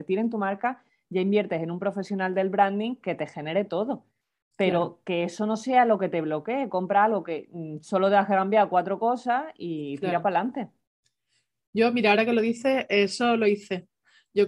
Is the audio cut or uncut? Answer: uncut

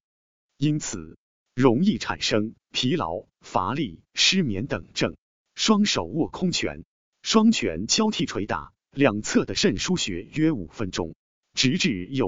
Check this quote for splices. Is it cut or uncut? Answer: cut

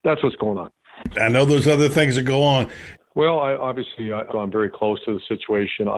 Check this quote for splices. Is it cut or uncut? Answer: cut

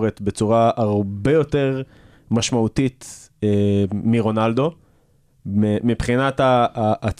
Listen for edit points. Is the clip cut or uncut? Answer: uncut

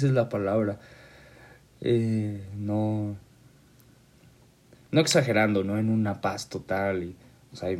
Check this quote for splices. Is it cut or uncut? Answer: uncut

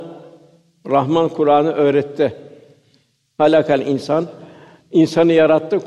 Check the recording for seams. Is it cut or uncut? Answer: uncut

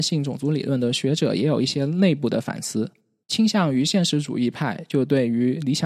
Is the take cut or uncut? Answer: cut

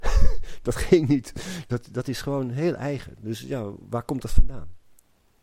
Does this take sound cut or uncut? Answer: uncut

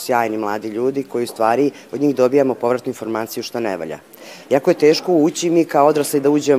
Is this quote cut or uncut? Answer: cut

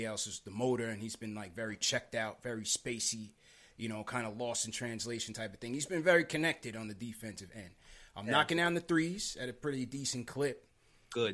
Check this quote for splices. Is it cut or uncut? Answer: uncut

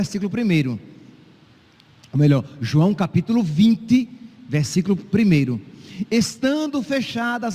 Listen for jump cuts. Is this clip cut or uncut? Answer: uncut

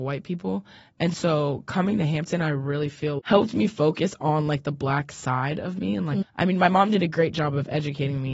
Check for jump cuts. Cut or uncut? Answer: cut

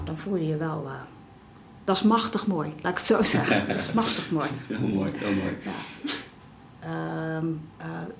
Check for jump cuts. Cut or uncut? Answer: cut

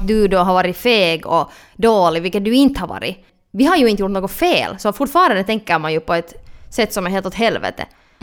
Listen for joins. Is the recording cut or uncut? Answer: uncut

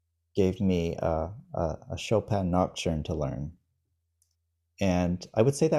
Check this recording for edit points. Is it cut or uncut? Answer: uncut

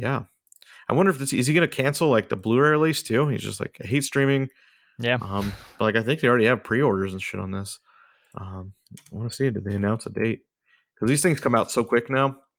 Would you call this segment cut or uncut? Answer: uncut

